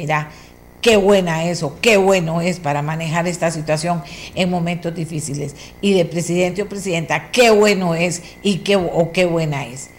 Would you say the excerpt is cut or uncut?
uncut